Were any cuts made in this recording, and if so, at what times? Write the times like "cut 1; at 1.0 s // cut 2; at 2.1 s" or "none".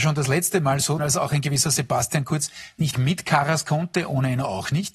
cut 1; at 1.0 s // cut 2; at 2.9 s